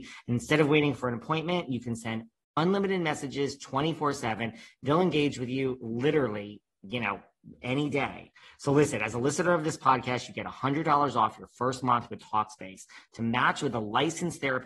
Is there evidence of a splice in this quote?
no; 0 cuts

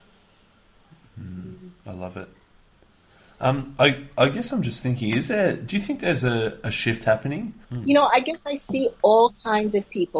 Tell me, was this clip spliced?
yes; 1 cut; at 7.6 s

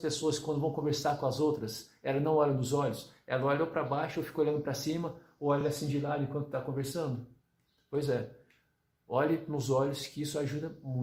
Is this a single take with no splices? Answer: yes; 0 cuts

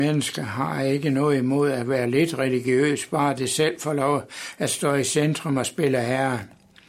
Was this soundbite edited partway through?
no; 0 cuts

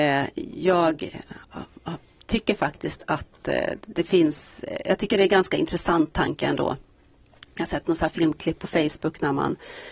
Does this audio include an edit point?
no; 0 cuts

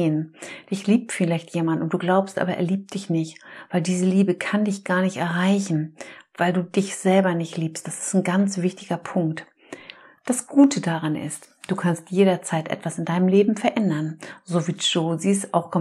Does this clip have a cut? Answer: no; 0 cuts

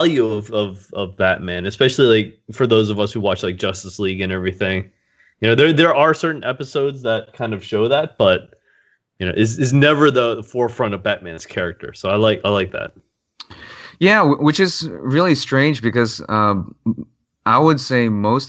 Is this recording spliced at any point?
no; 0 cuts

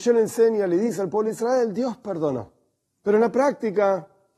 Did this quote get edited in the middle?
no; 0 cuts

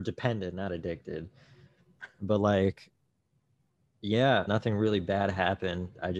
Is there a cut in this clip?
yes; 1 cut; at 4.5 s

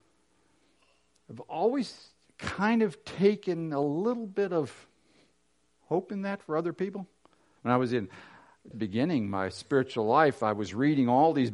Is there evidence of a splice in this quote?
yes; 2 cuts; at 7.6 s, 8.7 s

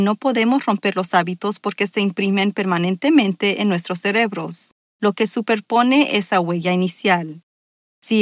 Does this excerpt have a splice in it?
yes; 1 cut; at 4.9 s

